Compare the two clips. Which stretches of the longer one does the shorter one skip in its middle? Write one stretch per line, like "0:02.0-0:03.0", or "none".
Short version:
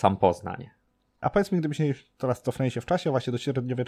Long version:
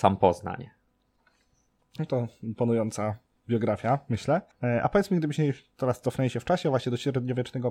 0:01.2-0:04.8